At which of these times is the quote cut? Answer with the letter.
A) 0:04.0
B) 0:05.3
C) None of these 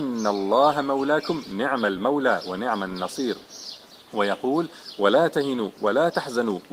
A